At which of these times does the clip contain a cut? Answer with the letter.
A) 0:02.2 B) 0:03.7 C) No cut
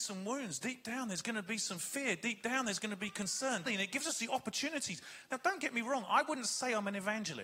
B